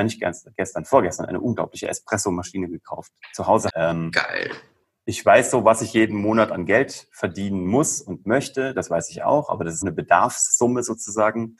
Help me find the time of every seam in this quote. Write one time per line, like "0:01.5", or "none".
0:03.7
0:09.8

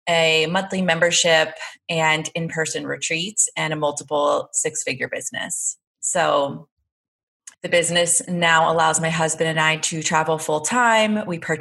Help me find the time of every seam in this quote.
0:07.5

